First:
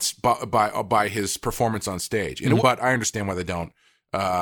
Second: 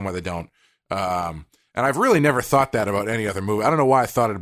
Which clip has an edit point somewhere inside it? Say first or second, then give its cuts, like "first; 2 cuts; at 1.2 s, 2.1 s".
first; 1 cut; at 2.6 s